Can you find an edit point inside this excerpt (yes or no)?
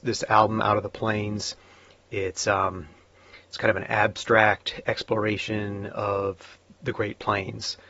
no